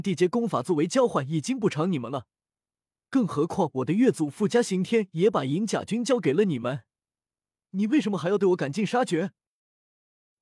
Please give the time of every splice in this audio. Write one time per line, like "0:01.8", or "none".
none